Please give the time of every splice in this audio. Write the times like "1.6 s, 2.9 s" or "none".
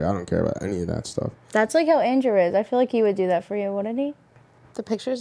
none